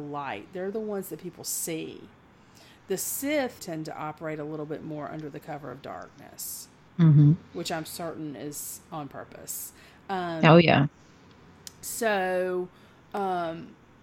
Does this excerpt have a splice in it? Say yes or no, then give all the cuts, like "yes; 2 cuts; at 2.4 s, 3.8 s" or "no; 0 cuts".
yes; 1 cut; at 3.6 s